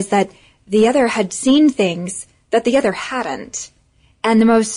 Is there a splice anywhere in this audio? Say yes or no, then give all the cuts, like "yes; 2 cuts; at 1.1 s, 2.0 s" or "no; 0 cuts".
no; 0 cuts